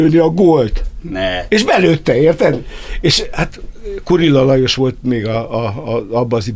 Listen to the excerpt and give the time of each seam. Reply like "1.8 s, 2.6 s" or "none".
none